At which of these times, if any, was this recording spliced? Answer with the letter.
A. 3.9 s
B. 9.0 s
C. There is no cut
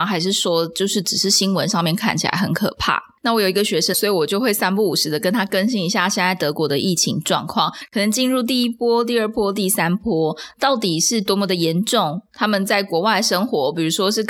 A